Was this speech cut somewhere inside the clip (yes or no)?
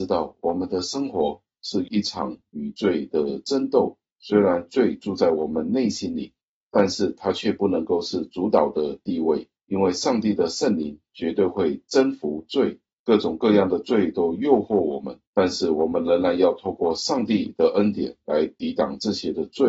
yes